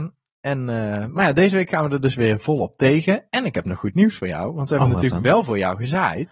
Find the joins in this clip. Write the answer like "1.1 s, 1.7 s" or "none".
none